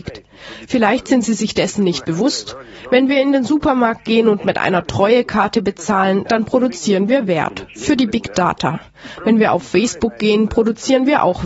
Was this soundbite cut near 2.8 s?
no; 0 cuts

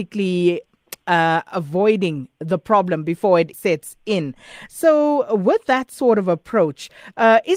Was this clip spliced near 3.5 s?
yes; 1 cut; at 3.5 s

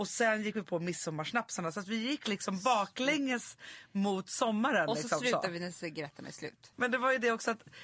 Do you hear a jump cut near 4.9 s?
no; 1 cut; at 6.7 s

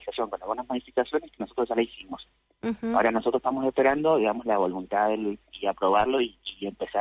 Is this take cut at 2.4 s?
no; 1 cut; at 5.5 s

